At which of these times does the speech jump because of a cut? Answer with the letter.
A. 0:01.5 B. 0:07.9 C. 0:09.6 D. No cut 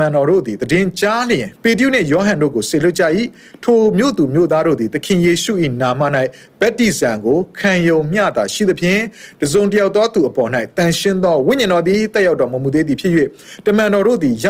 A